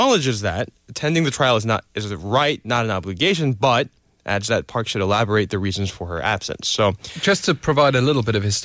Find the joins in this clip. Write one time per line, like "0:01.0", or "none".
none